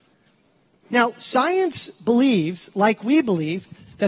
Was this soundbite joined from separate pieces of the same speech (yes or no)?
no